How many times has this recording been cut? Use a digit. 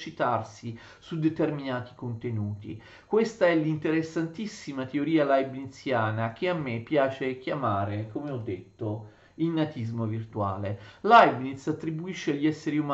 0